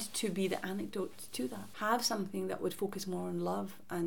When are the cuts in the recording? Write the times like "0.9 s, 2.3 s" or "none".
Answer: 1.7 s